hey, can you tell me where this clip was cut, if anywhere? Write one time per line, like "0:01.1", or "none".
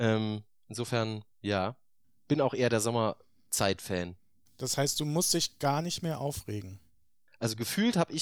0:07.3